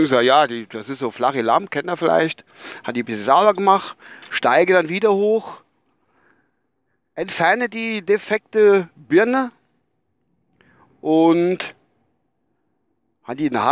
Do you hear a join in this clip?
no; 0 cuts

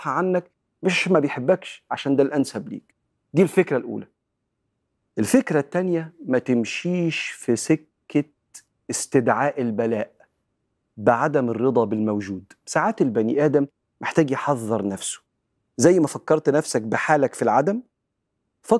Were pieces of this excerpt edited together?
no; 0 cuts

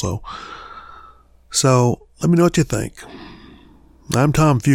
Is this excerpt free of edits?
yes; 0 cuts

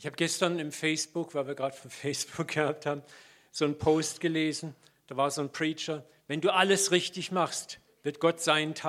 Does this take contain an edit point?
no; 0 cuts

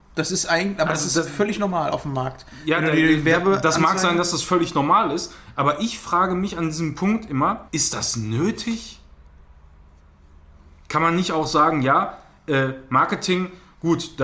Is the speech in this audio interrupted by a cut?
yes; 1 cut; at 7.7 s

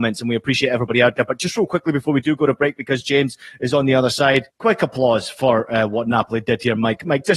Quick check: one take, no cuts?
no; 1 cut; at 4.5 s

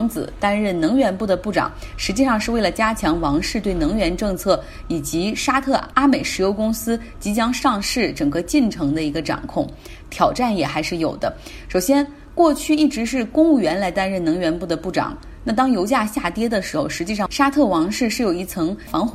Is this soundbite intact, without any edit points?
no; 1 cut; at 10.0 s

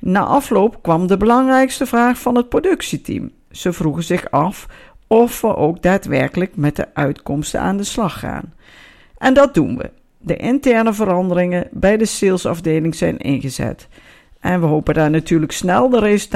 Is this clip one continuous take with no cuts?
yes; 0 cuts

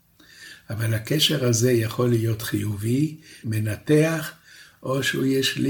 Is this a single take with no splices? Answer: no; 1 cut; at 3.4 s

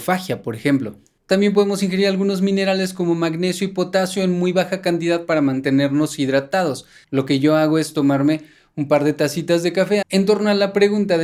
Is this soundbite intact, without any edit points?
no; 2 cuts; at 7.0 s, 10.0 s

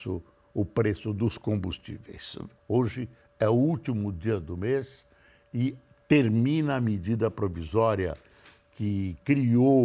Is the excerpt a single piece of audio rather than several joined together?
no; 1 cut; at 2.6 s

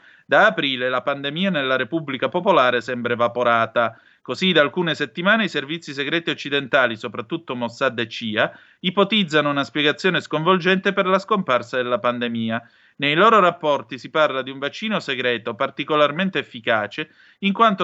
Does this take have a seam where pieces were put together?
no; 0 cuts

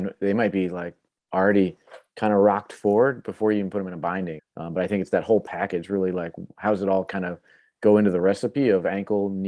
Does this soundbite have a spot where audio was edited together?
yes; 1 cut; at 4.4 s

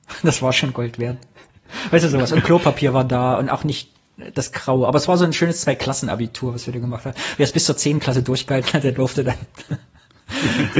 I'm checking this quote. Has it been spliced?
no; 0 cuts

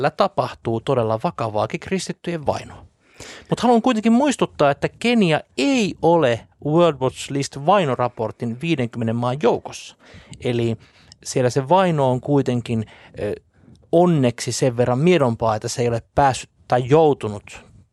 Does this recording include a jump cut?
no; 0 cuts

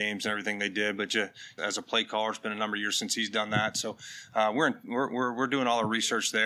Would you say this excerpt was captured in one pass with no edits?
no; 1 cut; at 1.6 s

